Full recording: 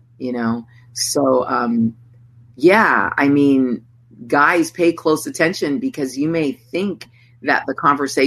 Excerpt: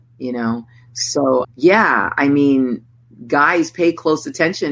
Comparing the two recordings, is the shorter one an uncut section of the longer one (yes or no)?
no